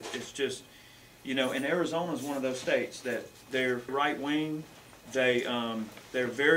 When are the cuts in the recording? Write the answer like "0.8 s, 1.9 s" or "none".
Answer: 3.9 s